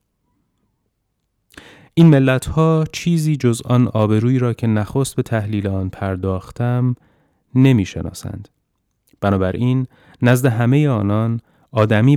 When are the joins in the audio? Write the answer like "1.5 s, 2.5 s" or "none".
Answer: none

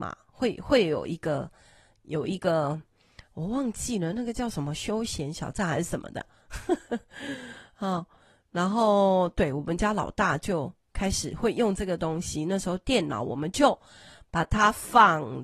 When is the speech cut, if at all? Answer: none

